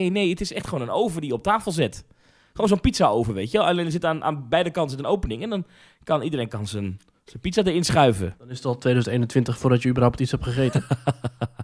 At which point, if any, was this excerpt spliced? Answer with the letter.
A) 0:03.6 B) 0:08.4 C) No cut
B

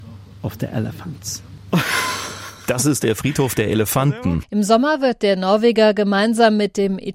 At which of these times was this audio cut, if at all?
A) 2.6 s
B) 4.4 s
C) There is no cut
B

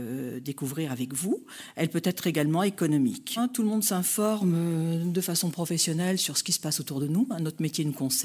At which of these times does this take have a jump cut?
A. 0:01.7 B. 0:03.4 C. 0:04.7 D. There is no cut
B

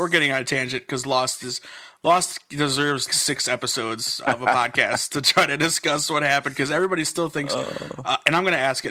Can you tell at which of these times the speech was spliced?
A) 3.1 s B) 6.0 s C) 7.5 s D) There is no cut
A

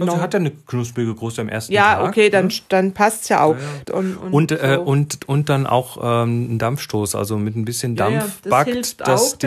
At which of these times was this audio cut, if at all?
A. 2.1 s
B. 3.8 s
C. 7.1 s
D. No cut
B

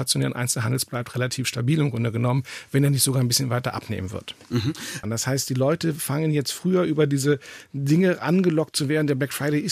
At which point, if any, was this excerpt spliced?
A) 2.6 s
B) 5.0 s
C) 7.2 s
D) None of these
B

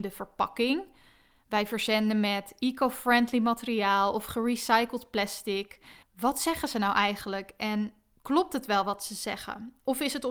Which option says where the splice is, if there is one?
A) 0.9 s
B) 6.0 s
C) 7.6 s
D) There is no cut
B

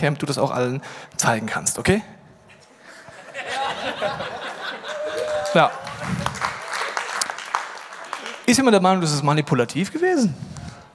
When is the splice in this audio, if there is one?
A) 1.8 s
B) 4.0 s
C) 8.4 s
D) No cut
C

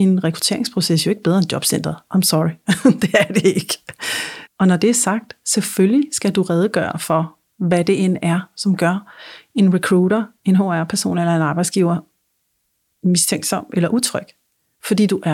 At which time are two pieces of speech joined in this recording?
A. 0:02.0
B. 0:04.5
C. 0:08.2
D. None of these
B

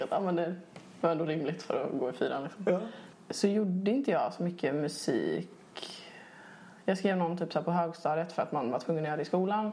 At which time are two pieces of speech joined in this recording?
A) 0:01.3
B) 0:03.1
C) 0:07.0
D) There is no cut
B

